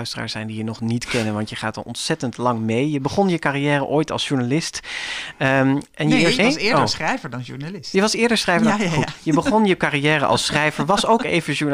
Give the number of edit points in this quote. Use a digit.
1